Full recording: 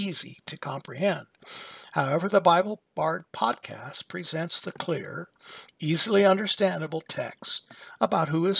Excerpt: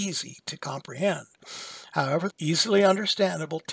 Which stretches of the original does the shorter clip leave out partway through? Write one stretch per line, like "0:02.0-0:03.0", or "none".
0:02.3-0:05.7